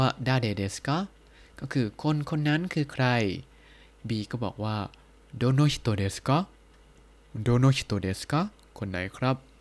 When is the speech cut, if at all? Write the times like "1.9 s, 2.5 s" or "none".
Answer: none